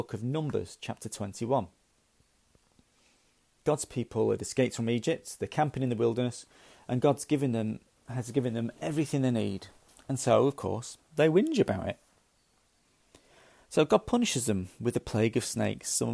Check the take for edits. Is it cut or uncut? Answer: uncut